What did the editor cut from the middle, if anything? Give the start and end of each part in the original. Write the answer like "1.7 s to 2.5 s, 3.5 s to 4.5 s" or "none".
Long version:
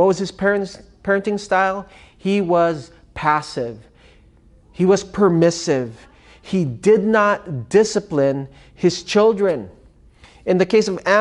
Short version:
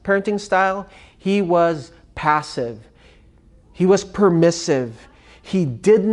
none